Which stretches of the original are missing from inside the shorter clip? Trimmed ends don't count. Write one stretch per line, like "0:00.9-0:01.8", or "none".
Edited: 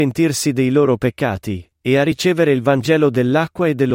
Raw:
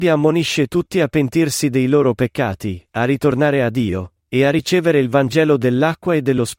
0:02.9-0:04.2